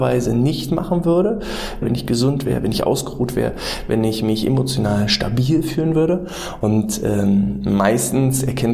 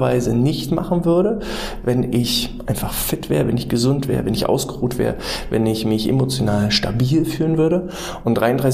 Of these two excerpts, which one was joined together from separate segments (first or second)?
first